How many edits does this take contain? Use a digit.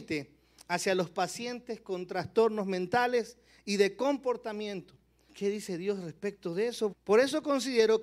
2